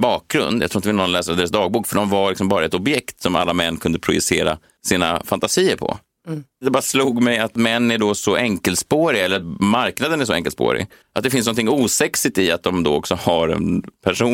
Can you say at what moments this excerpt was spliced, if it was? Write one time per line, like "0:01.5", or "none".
0:11.0